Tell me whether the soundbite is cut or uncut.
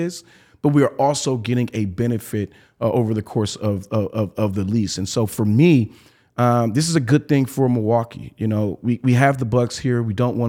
uncut